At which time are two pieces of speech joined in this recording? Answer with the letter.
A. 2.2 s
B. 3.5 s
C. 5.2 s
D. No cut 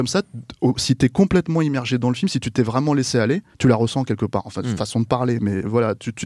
B